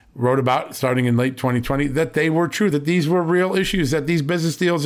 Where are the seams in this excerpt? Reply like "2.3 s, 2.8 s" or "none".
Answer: none